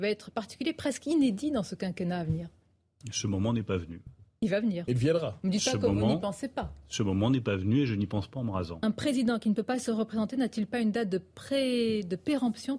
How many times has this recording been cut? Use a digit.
0